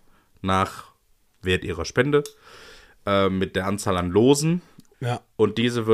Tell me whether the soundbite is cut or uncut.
cut